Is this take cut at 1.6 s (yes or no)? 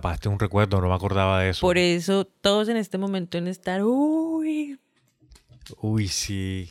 no